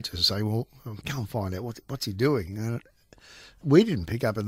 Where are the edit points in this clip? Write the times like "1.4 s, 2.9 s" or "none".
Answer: 1.0 s